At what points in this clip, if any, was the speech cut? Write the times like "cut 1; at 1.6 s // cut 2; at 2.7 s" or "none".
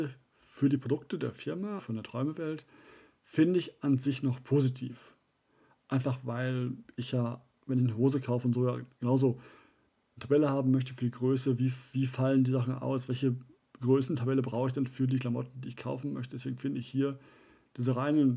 cut 1; at 1.8 s